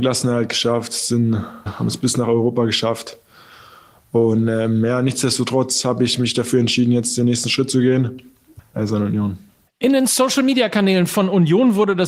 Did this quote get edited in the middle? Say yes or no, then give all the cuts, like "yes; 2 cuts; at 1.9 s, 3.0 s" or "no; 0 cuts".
yes; 2 cuts; at 1.7 s, 8.7 s